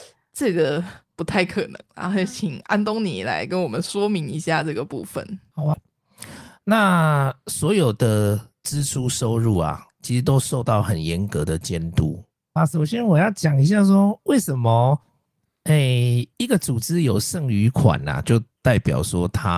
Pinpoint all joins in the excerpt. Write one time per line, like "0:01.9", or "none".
0:05.7
0:12.6
0:16.3